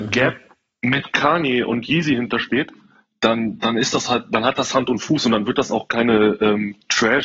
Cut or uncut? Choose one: uncut